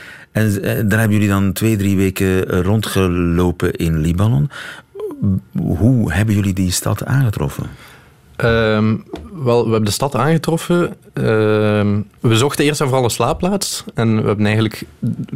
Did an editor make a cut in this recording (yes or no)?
yes